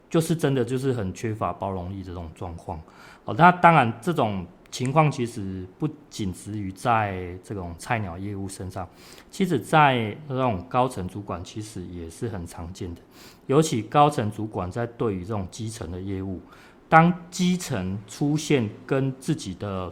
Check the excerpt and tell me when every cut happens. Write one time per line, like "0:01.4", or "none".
none